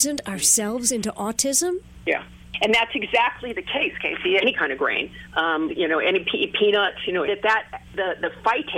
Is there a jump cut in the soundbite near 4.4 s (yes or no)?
yes